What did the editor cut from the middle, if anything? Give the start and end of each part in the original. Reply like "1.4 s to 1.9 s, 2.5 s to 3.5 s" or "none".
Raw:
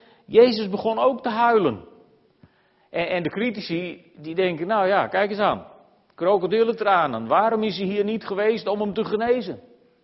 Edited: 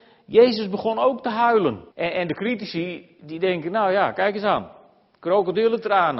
1.9 s to 2.9 s